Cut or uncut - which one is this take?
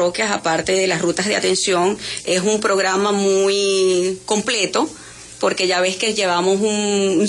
uncut